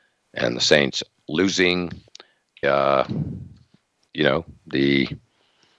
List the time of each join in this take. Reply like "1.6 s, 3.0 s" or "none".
2.6 s